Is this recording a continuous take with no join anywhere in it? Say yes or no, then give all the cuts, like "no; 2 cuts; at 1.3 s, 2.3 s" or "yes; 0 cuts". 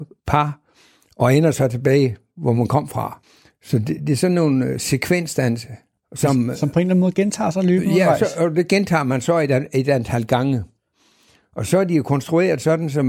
yes; 0 cuts